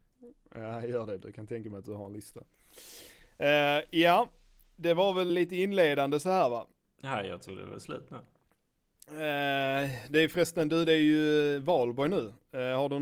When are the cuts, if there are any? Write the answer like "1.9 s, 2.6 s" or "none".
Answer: 5.3 s